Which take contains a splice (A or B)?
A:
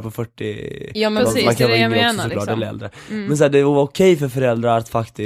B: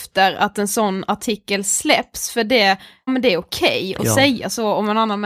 B